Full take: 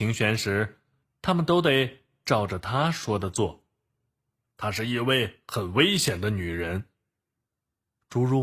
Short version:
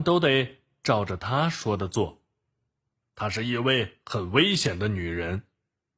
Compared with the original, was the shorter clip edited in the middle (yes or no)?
no